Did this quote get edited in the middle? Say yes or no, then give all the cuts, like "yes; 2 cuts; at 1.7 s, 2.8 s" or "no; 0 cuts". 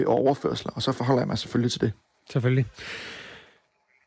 no; 0 cuts